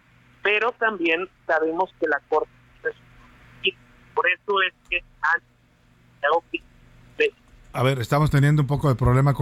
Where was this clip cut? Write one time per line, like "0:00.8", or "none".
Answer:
none